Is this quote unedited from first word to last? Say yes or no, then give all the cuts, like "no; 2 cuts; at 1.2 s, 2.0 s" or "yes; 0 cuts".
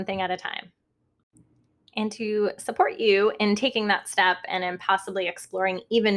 yes; 0 cuts